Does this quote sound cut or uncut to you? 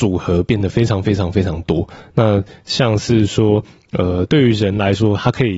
uncut